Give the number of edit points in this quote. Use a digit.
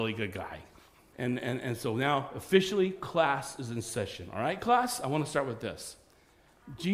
1